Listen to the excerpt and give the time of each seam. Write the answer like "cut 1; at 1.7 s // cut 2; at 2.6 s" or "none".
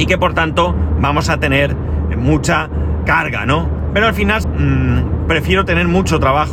cut 1; at 3.0 s // cut 2; at 4.4 s